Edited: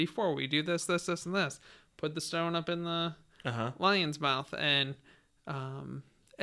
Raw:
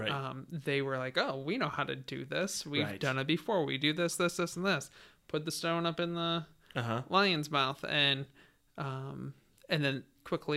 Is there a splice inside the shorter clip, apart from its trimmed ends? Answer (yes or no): no